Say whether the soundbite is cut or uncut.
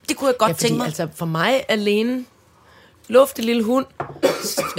uncut